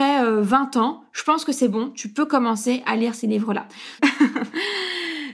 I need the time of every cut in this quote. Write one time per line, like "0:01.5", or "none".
0:04.0